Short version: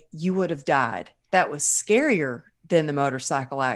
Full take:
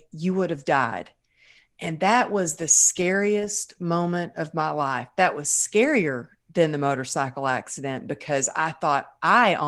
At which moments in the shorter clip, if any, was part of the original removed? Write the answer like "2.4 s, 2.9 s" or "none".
1.3 s